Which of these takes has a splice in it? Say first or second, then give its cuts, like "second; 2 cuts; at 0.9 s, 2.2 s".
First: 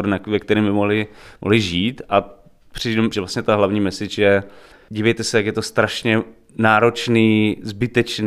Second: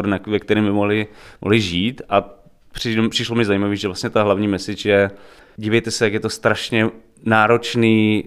first; 1 cut; at 3.1 s